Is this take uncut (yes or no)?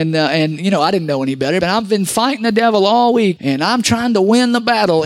no